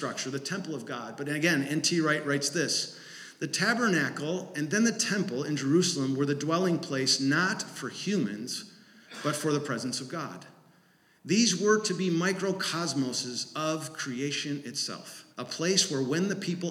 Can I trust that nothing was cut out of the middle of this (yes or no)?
no